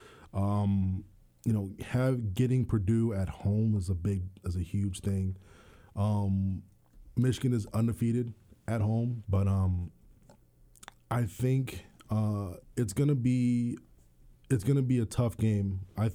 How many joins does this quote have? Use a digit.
1